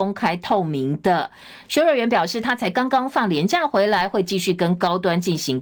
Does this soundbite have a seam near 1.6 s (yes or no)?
yes